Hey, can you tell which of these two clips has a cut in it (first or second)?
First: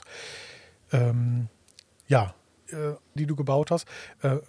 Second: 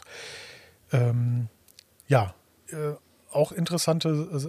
first